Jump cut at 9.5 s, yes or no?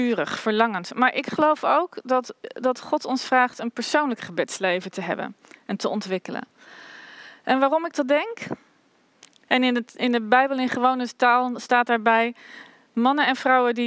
yes